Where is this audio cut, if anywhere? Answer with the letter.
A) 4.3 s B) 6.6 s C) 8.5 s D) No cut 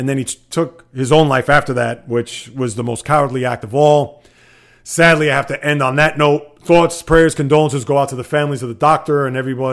D